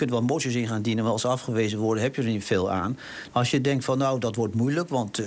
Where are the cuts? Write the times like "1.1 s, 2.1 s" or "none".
3.3 s